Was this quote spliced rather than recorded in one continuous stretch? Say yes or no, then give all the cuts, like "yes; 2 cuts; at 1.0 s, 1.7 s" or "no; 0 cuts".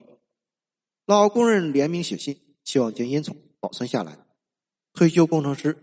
no; 0 cuts